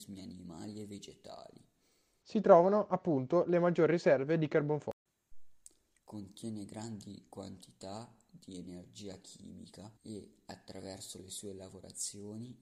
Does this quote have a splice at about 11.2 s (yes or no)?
no